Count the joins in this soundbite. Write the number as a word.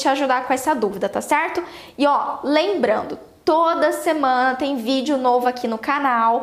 zero